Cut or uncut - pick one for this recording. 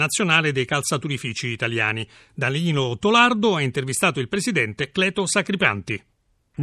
uncut